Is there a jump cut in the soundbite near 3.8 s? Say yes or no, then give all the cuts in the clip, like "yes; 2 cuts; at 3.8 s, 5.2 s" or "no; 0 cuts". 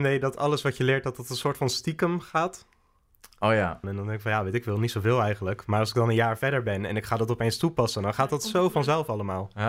yes; 1 cut; at 3.8 s